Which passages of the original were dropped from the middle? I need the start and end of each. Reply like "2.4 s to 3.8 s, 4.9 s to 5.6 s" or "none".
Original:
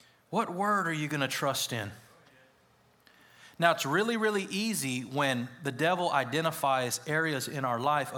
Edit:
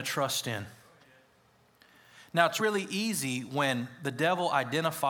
3.8 s to 4.2 s